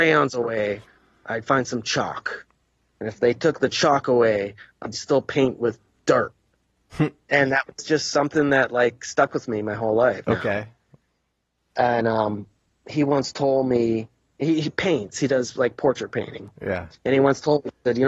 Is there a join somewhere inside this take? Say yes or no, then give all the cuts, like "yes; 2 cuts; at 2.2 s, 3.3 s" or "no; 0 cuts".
yes; 1 cut; at 10.2 s